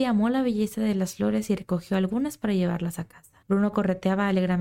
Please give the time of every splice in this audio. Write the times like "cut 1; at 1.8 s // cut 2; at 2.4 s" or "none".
cut 1; at 3.4 s

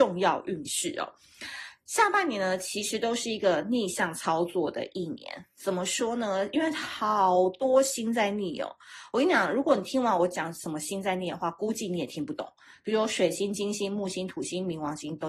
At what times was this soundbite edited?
none

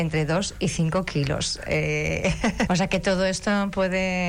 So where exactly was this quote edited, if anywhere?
cut 1; at 2.7 s

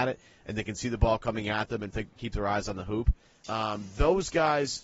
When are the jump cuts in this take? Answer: cut 1; at 1.9 s // cut 2; at 3.4 s

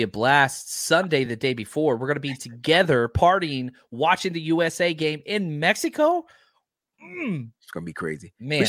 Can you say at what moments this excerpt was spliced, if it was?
none

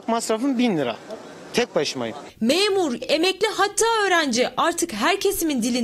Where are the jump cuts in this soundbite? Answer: cut 1; at 3.0 s

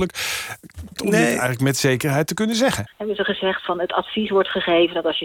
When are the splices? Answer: cut 1; at 1.0 s // cut 2; at 2.9 s

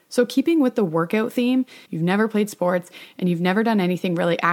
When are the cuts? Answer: cut 1; at 1.8 s

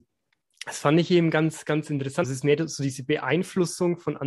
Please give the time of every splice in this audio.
cut 1; at 2.2 s

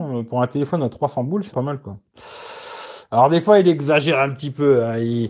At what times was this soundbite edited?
cut 1; at 1.5 s // cut 2; at 3.1 s

